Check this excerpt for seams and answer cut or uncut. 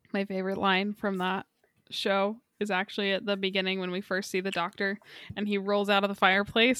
uncut